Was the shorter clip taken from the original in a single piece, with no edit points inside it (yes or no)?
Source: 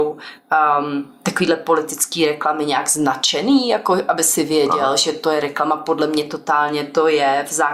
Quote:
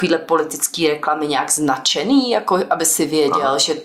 yes